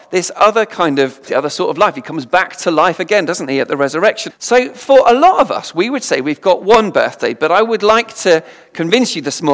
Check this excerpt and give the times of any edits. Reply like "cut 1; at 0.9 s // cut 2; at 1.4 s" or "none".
cut 1; at 1.3 s // cut 2; at 4.3 s